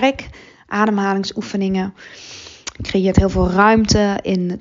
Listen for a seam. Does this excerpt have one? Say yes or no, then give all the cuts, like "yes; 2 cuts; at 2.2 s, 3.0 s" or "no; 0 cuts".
no; 0 cuts